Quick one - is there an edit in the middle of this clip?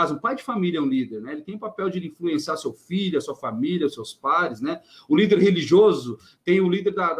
no; 0 cuts

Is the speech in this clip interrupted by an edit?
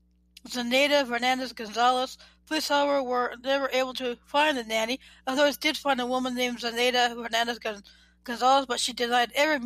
no; 0 cuts

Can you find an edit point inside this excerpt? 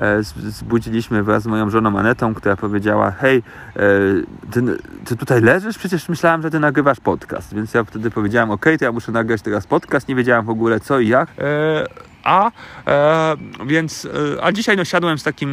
yes; 1 cut; at 11.3 s

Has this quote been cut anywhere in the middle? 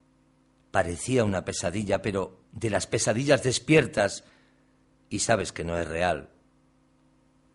yes; 1 cut; at 2.4 s

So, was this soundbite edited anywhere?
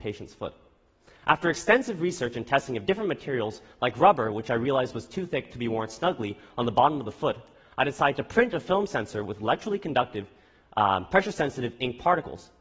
no; 0 cuts

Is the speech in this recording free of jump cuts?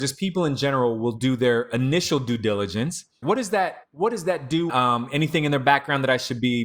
no; 2 cuts; at 3.2 s, 4.7 s

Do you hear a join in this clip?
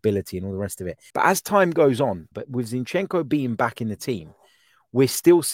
yes; 2 cuts; at 1.1 s, 2.3 s

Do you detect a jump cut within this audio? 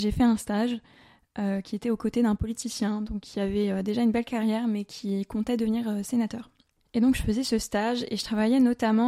no; 0 cuts

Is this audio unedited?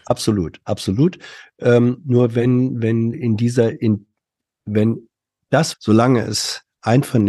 no; 2 cuts; at 3.1 s, 5.7 s

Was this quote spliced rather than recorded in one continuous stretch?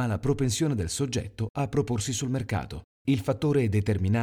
yes; 1 cut; at 2.9 s

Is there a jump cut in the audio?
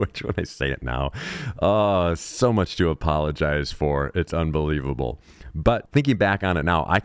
no; 0 cuts

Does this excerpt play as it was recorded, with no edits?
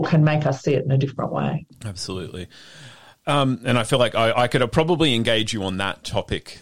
yes; 0 cuts

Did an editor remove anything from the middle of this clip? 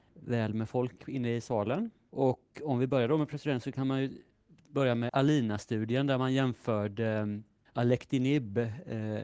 no; 0 cuts

